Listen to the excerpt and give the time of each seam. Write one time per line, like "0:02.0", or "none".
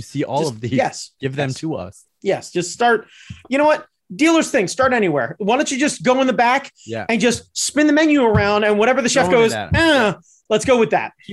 none